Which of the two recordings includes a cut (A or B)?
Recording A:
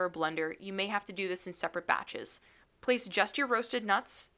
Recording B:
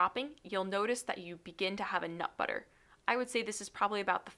A